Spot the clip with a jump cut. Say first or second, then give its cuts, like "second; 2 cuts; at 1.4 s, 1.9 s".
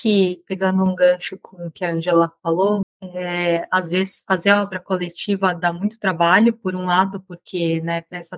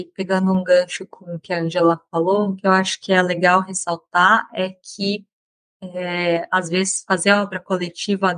first; 1 cut; at 2.8 s